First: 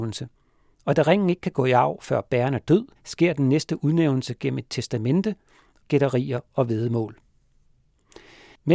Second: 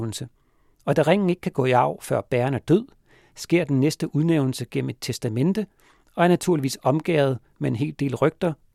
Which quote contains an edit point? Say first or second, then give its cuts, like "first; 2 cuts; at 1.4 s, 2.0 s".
first; 2 cuts; at 3.0 s, 5.8 s